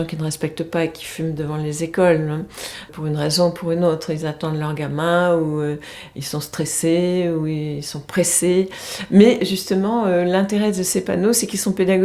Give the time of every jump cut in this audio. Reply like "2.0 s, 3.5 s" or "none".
2.9 s